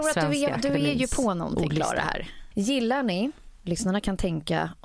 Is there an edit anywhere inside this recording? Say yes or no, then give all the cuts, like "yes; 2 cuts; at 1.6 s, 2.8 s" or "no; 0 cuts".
yes; 1 cut; at 2.5 s